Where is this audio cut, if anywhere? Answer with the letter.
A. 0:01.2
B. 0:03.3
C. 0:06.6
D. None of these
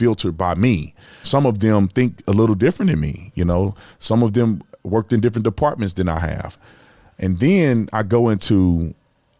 A